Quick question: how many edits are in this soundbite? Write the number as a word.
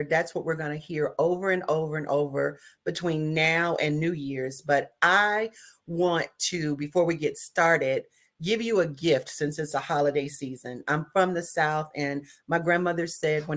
zero